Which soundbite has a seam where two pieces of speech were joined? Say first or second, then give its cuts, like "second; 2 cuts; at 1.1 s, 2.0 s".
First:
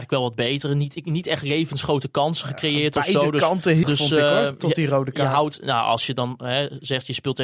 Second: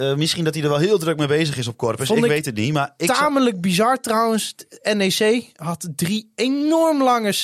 first; 1 cut; at 3.8 s